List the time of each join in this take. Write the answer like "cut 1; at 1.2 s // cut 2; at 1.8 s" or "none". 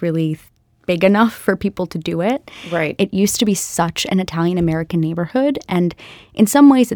cut 1; at 3.0 s